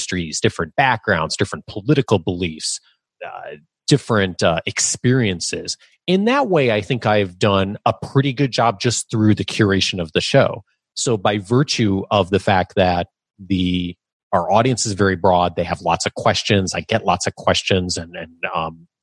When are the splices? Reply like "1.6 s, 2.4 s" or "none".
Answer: 3.1 s